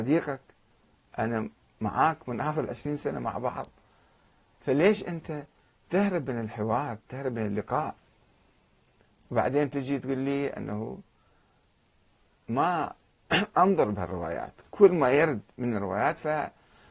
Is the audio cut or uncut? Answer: uncut